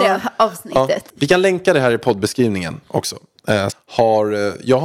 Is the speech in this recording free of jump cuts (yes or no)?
no